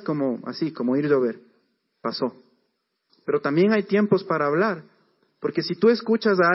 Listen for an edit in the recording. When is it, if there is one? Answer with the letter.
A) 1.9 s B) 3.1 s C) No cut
B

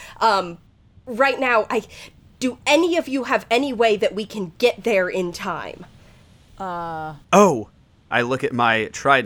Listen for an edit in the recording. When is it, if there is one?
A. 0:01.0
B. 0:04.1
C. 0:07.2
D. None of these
C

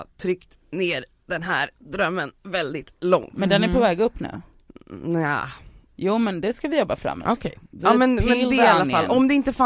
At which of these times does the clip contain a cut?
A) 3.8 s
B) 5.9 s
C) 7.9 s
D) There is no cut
D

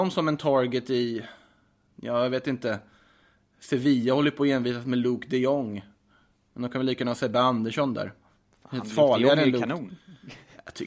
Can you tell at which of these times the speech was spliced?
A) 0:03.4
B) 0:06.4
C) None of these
C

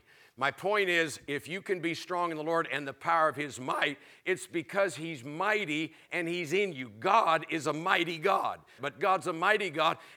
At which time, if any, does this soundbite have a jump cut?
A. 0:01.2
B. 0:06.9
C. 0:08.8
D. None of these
C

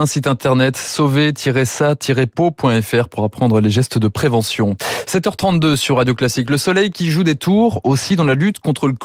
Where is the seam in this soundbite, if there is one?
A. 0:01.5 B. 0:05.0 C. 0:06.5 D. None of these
D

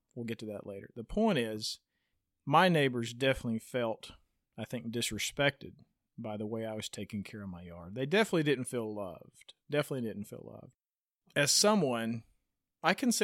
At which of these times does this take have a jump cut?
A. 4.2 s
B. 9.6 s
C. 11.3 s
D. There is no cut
D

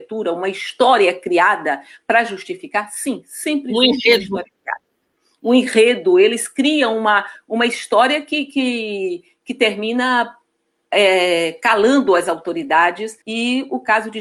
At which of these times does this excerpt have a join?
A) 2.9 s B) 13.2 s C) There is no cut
B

